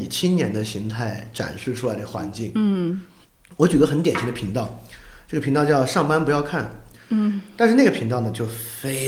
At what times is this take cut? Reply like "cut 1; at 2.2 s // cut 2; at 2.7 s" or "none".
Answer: none